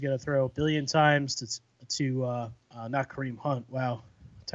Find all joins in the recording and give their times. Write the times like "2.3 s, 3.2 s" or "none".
2.6 s